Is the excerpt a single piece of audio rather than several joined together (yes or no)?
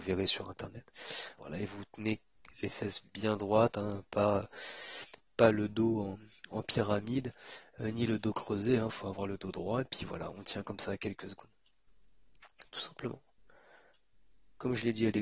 no